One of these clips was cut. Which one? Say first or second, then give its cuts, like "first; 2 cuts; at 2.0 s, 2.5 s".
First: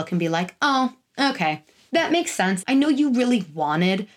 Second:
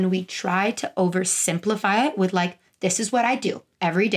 first; 1 cut; at 2.6 s